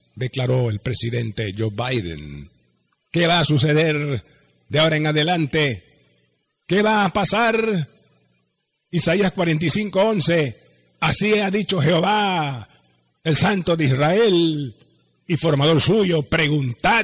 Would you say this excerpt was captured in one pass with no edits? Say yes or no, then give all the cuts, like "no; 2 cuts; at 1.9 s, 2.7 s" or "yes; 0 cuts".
yes; 0 cuts